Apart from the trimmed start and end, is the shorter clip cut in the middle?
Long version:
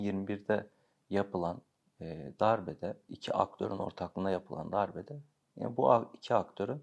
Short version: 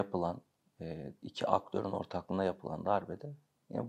yes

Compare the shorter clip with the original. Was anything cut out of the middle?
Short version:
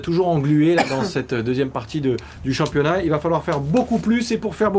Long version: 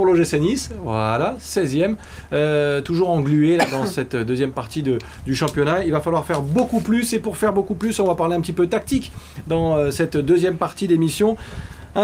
no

